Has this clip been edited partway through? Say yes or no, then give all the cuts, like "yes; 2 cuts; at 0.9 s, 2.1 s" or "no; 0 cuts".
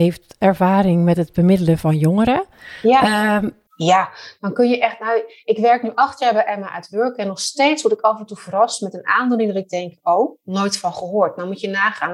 yes; 1 cut; at 3.7 s